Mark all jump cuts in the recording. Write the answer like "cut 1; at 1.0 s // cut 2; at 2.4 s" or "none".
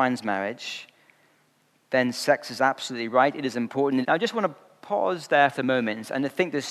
cut 1; at 4.0 s // cut 2; at 5.5 s